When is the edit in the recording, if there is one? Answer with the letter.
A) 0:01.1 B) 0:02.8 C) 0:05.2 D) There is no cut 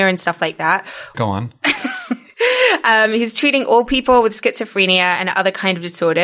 A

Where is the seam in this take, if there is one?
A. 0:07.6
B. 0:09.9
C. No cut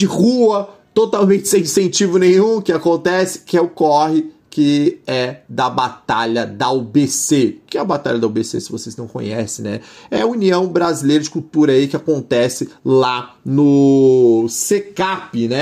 C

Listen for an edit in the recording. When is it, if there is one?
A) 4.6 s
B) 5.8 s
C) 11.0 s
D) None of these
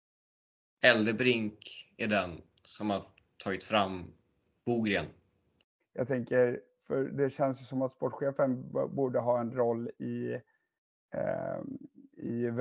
B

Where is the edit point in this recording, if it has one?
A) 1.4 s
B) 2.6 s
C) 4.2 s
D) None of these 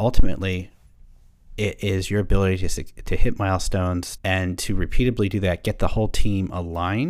C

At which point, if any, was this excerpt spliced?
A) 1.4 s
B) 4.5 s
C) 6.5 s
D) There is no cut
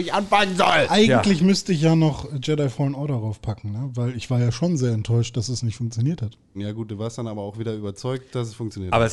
C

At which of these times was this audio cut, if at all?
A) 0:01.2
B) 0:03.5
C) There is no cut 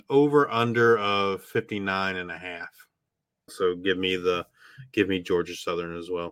B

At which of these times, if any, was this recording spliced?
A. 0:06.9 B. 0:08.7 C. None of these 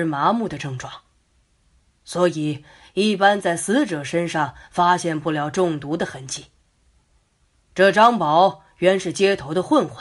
C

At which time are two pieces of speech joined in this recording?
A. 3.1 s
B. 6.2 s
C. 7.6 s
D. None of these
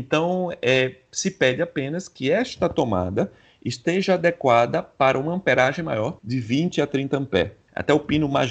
B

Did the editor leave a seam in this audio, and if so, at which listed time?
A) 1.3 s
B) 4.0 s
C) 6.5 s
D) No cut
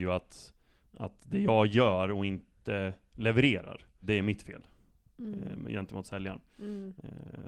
B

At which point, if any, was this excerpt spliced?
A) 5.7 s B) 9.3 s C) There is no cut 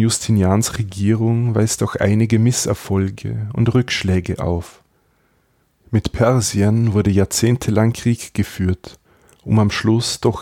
C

